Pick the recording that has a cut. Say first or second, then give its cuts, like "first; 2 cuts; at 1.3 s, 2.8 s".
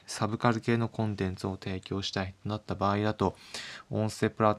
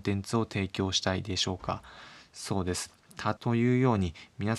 second; 1 cut; at 3.4 s